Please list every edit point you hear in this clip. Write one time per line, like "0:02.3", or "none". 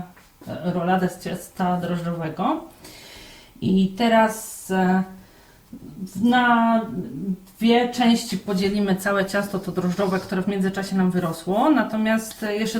none